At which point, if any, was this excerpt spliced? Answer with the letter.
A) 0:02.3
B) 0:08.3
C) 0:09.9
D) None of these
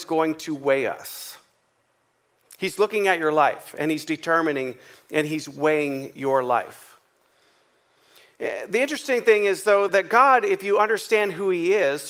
C